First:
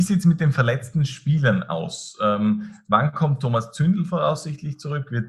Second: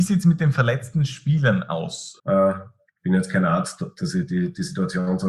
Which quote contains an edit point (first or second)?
second